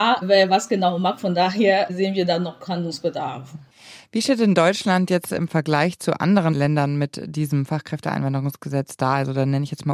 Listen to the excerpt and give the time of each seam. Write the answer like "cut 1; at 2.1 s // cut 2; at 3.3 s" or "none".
none